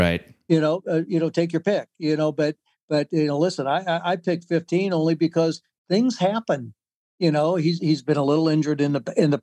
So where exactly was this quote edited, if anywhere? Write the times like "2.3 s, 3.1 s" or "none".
none